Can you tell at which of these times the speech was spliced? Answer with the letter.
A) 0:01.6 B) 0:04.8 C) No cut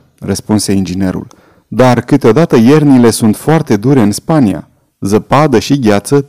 C